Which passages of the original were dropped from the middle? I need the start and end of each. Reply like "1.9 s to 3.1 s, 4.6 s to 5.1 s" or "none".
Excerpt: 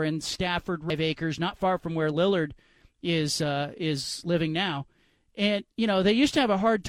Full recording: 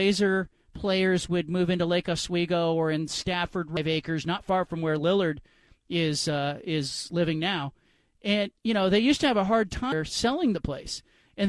none

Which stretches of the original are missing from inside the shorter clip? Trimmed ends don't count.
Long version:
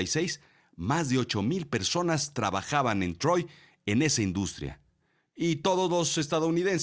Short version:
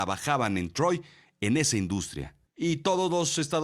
4.9 s to 5.3 s

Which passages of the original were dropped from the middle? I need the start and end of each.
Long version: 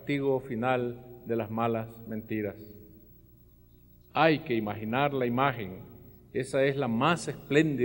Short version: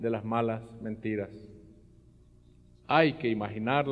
none

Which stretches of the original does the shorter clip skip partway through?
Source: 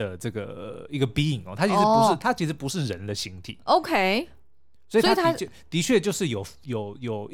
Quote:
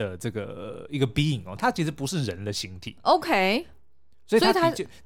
1.6 s to 2.2 s

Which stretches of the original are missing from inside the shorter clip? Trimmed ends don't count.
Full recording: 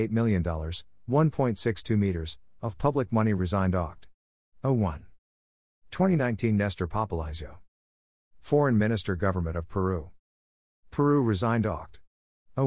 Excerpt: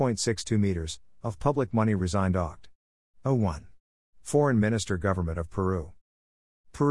5.5 s to 8.3 s

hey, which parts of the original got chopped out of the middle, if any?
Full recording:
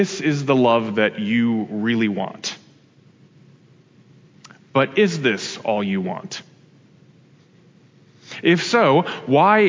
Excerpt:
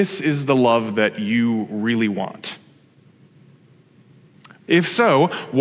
4.7 s to 8.4 s

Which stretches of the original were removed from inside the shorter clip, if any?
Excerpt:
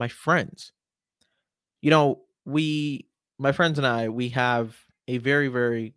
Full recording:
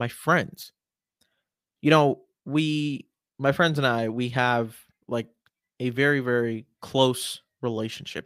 5.0 s to 5.7 s

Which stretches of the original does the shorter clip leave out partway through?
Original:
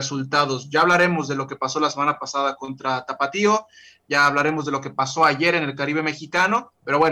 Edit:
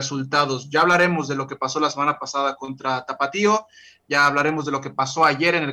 none

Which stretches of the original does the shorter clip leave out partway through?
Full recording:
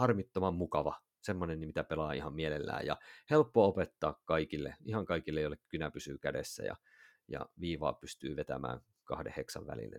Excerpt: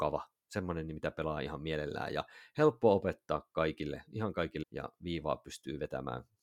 5.3 s to 7.2 s

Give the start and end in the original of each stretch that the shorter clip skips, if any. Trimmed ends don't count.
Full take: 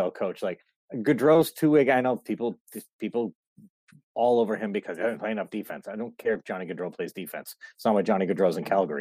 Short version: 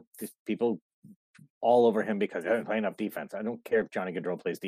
none

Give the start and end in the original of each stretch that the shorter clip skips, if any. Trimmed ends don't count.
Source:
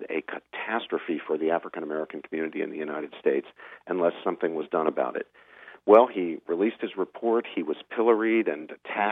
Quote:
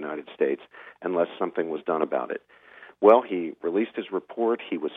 none

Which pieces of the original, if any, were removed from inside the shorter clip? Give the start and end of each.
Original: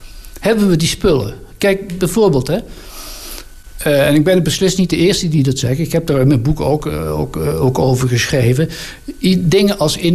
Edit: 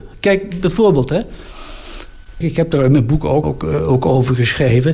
3.8 s to 5.8 s, 6.8 s to 7.2 s

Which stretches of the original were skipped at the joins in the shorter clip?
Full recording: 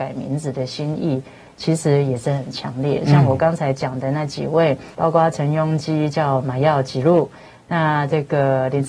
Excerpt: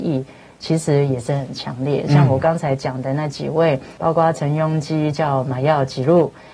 none

